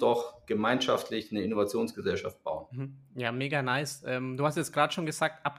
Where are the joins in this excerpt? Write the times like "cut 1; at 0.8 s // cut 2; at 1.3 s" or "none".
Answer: none